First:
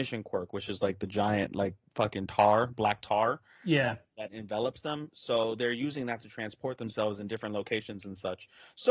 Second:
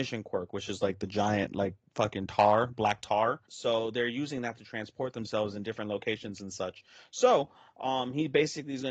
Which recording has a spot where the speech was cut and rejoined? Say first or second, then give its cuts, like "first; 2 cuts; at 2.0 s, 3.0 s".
second; 1 cut; at 3.5 s